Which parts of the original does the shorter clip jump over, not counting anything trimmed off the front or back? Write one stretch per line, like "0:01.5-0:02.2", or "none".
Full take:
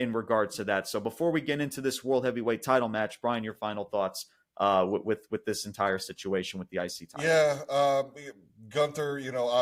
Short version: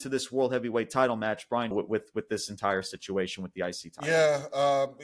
0:03.4-0:04.9